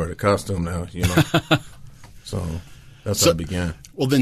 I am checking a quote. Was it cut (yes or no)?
no